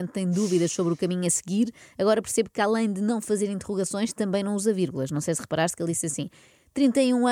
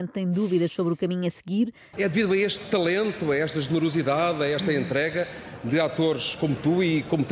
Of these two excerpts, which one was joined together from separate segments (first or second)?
second